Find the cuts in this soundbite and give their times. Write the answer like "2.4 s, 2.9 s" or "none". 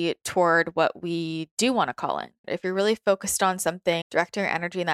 2.4 s, 4.0 s